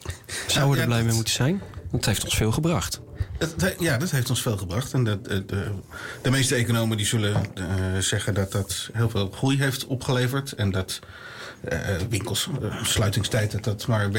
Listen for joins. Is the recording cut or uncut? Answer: uncut